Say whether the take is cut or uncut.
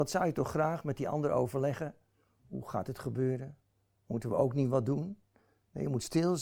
uncut